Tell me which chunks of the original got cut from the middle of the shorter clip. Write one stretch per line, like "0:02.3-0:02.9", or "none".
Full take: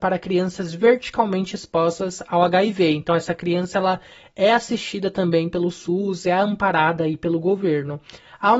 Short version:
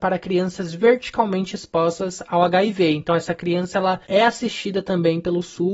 0:04.0-0:04.3